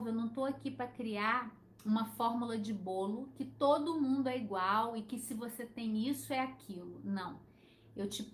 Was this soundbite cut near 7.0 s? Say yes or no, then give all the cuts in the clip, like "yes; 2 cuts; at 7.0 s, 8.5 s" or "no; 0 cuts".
no; 0 cuts